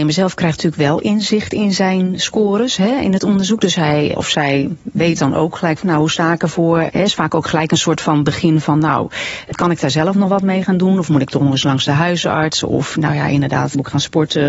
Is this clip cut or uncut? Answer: uncut